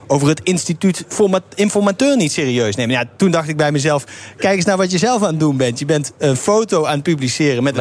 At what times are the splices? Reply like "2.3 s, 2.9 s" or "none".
none